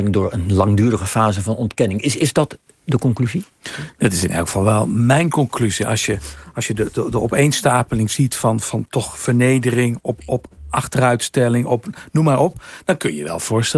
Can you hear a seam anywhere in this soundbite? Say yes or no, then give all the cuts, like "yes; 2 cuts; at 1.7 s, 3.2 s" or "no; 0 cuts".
no; 0 cuts